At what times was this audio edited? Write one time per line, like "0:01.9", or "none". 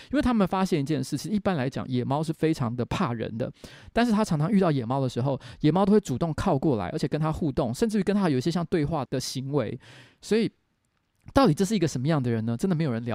0:09.1